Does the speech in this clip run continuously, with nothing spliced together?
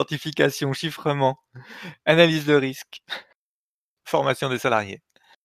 no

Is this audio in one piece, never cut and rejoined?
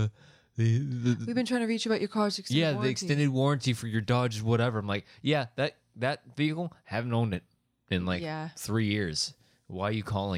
yes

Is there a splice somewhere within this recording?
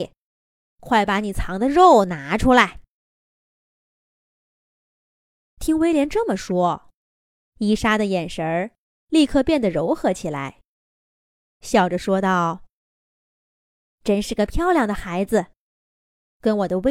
yes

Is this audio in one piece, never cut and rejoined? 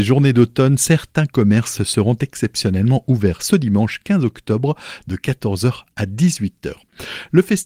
yes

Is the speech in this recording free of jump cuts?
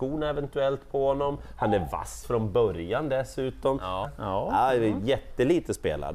no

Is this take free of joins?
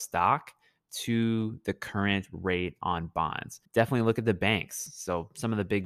no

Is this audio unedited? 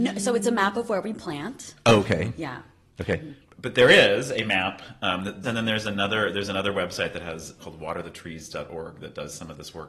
no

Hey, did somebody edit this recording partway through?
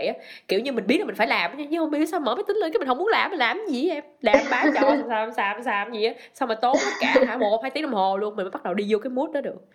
no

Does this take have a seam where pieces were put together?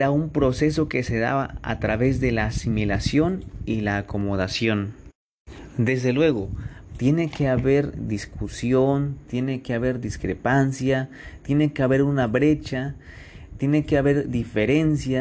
yes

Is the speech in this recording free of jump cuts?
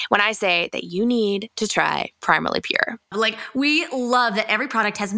no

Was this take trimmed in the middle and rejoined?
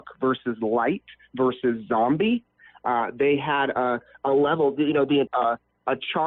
yes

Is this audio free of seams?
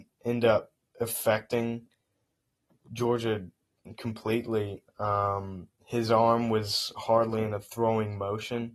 no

